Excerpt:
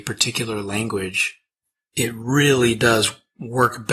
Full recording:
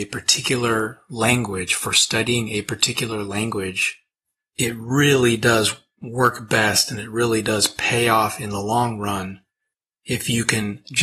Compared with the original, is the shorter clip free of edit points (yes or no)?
yes